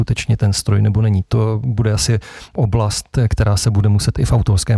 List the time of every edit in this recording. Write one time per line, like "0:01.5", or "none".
none